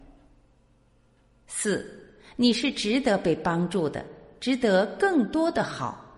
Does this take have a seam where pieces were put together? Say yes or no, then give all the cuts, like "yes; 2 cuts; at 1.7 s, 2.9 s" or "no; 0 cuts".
no; 0 cuts